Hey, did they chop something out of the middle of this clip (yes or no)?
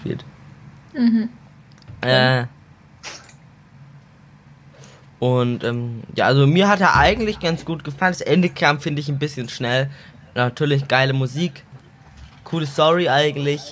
no